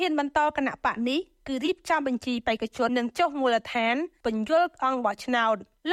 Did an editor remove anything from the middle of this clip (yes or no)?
yes